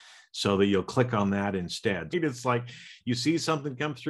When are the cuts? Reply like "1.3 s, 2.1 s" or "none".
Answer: 2.1 s